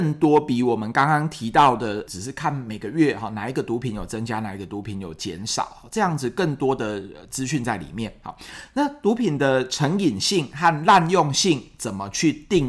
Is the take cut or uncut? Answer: uncut